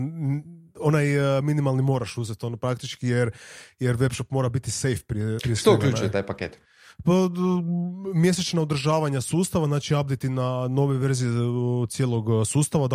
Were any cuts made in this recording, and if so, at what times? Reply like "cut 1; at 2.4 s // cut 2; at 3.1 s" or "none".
cut 1; at 5.4 s